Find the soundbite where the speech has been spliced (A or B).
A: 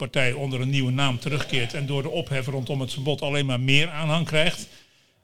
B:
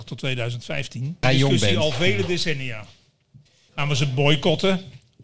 B